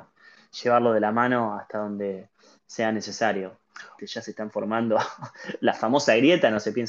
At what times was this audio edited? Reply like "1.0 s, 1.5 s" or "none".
4.0 s